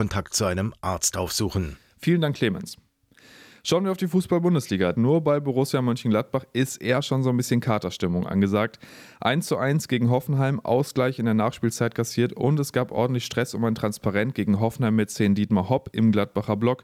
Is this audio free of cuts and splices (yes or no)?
no